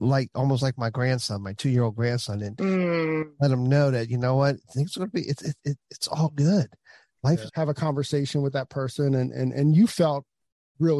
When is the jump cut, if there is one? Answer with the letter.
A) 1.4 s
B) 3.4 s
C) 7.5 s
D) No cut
C